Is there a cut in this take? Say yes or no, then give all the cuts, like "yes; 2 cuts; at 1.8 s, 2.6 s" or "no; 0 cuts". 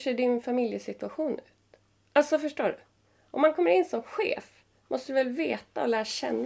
no; 0 cuts